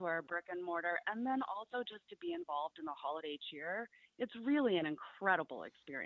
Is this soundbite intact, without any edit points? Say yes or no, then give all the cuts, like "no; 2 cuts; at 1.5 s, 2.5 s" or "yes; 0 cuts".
yes; 0 cuts